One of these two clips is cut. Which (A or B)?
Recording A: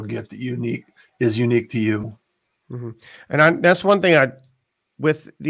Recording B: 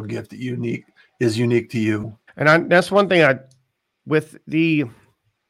B